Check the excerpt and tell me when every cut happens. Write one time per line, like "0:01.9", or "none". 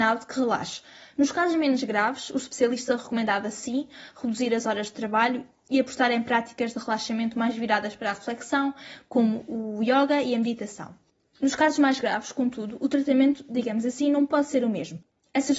none